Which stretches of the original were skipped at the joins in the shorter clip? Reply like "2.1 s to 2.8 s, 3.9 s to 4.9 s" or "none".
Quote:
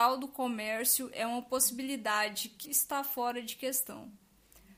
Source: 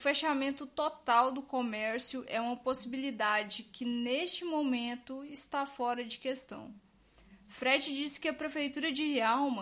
3.8 s to 5.3 s